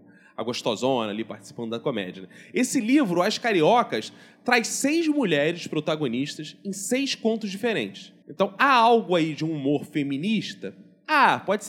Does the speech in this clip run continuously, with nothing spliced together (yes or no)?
yes